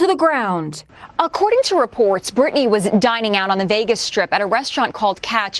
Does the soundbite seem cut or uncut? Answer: uncut